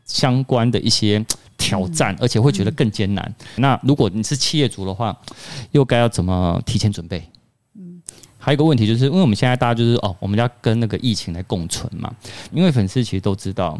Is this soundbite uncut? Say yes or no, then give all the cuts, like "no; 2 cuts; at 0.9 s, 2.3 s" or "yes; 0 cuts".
no; 3 cuts; at 3.6 s, 8.4 s, 12.5 s